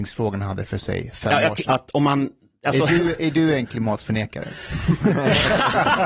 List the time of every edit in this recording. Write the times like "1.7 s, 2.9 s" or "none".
1.6 s